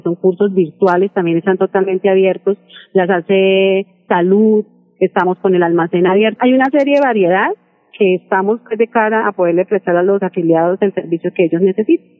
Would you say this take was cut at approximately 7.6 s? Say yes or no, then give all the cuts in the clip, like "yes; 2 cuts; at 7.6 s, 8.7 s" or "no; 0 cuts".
no; 1 cut; at 6.4 s